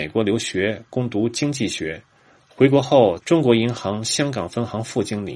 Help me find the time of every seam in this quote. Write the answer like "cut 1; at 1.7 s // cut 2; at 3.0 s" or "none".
cut 1; at 3.2 s